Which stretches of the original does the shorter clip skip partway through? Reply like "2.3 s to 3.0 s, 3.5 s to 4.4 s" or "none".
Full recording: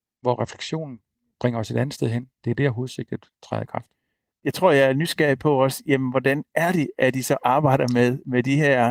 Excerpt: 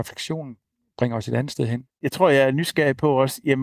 2.3 s to 4.3 s